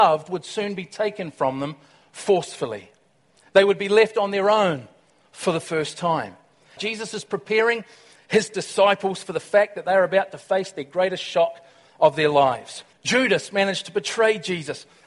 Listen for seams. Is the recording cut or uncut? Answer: cut